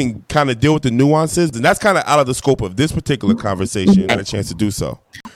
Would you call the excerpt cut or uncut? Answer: cut